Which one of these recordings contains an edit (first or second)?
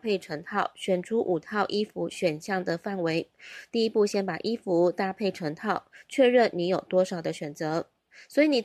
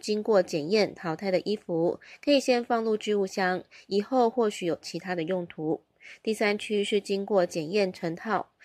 first